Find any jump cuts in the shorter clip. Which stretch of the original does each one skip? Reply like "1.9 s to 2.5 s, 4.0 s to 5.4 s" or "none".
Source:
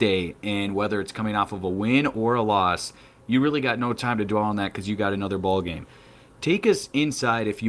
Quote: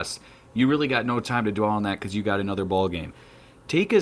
none